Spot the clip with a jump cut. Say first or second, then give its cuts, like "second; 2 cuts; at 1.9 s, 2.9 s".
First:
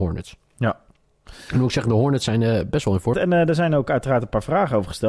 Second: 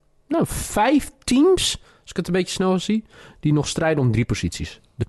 first; 1 cut; at 3.1 s